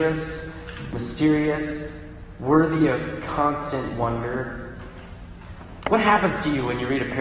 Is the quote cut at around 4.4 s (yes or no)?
no